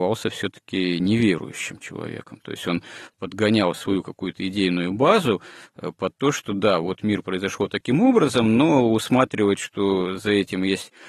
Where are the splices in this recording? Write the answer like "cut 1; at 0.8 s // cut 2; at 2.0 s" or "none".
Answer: none